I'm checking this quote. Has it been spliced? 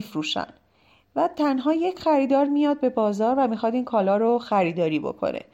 no; 0 cuts

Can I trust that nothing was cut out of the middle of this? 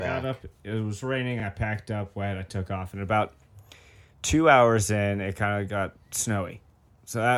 yes; 0 cuts

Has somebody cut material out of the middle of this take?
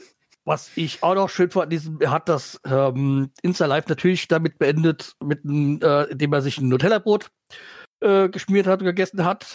no; 0 cuts

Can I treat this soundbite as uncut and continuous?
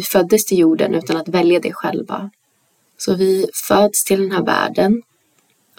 no; 1 cut; at 2.9 s

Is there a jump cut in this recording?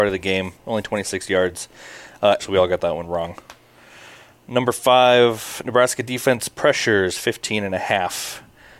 yes; 1 cut; at 2.4 s

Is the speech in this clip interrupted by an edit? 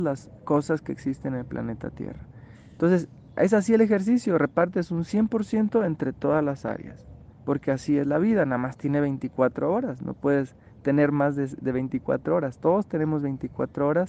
yes; 1 cut; at 2.5 s

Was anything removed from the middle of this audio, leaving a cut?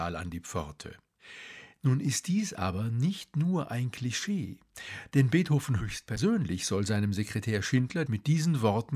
yes; 1 cut; at 8.1 s

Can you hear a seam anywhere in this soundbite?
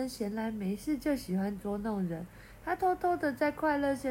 no; 0 cuts

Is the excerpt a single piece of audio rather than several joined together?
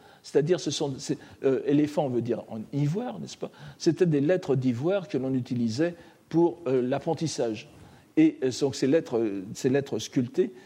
yes; 0 cuts

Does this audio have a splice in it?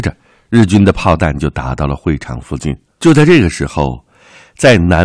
yes; 1 cut; at 3.0 s

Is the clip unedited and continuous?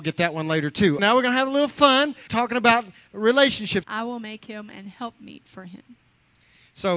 no; 3 cuts; at 1.0 s, 2.3 s, 3.8 s

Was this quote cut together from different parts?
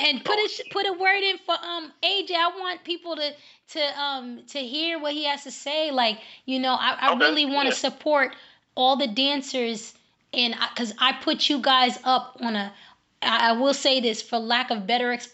no; 0 cuts

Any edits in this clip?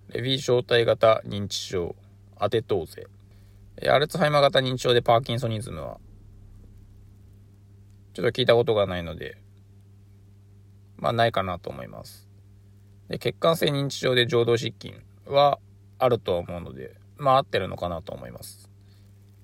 no; 0 cuts

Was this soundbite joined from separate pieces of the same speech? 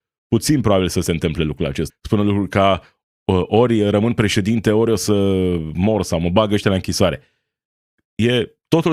yes; 1 cut; at 1.9 s

